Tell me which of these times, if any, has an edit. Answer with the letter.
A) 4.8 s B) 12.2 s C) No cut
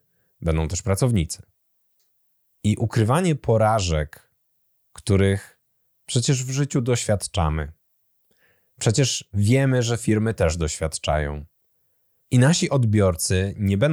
B